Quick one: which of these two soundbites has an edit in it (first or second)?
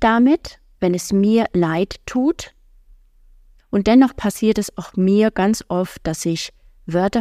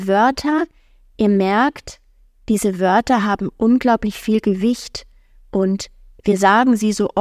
first